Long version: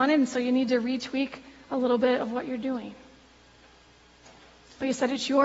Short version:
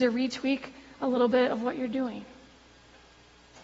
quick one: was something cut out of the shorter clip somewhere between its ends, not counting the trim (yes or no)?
no